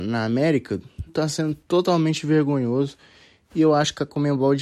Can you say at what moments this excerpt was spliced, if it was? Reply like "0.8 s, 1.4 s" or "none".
1.1 s